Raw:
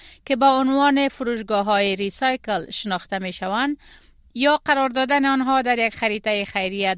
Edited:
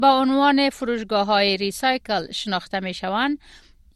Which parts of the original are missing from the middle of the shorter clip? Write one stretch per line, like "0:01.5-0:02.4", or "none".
none